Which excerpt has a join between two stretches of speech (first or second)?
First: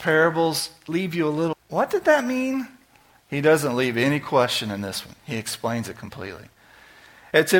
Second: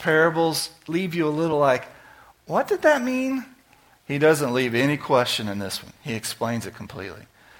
first